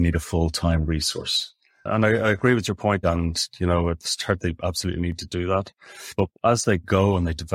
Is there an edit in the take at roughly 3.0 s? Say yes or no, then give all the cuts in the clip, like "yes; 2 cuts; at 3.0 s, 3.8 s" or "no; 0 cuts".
yes; 1 cut; at 3.0 s